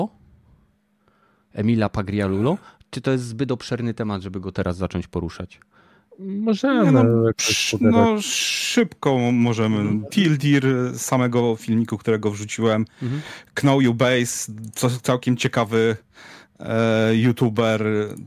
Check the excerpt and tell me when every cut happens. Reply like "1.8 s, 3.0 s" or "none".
10.1 s